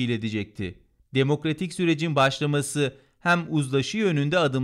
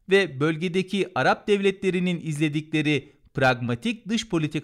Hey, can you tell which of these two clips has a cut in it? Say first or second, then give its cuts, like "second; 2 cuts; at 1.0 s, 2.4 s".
first; 1 cut; at 1.0 s